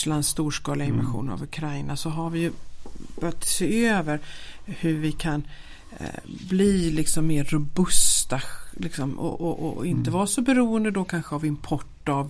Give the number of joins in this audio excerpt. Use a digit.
0